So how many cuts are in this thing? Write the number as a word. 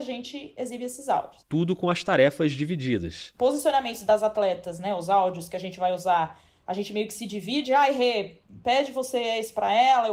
zero